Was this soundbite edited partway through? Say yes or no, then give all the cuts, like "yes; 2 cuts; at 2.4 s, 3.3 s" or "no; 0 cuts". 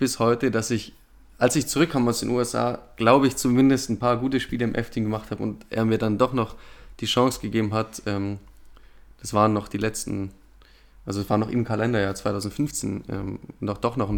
no; 0 cuts